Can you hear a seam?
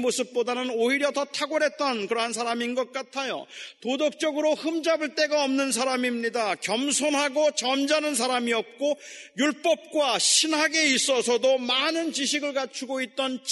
no; 0 cuts

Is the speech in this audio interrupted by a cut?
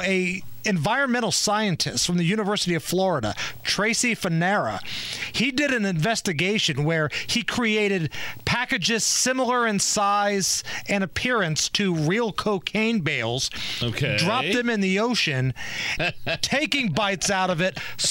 yes; 1 cut; at 16.0 s

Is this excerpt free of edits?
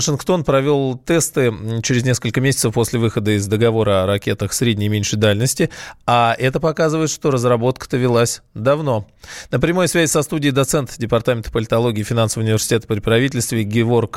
yes; 0 cuts

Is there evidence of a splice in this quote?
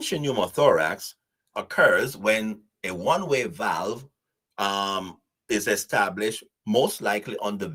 yes; 1 cut; at 1.5 s

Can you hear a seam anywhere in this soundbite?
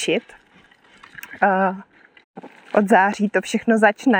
no; 0 cuts

